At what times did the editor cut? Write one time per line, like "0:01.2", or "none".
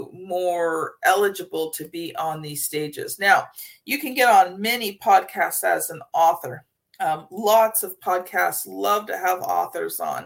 none